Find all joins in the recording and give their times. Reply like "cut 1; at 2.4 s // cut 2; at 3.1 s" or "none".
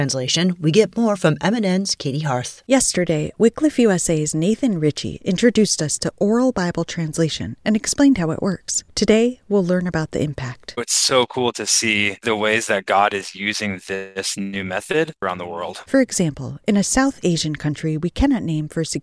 none